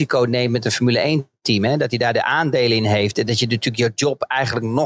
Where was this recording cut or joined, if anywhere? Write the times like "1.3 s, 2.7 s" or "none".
none